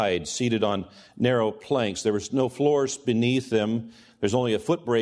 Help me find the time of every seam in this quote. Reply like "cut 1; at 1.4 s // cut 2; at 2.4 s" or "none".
none